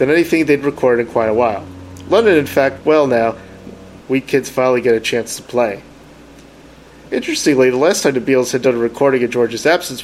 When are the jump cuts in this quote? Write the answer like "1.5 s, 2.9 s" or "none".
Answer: 2.8 s, 4.0 s